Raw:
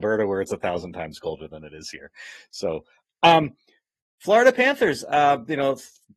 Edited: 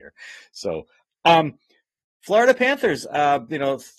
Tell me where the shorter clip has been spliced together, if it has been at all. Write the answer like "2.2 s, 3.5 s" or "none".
none